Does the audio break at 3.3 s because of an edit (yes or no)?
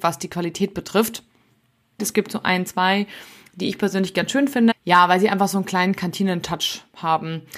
no